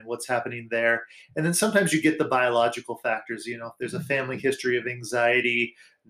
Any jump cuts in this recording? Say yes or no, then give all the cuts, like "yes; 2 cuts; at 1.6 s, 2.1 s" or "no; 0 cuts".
no; 0 cuts